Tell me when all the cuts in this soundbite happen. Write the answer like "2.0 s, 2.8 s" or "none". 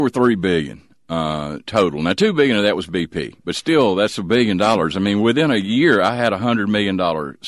none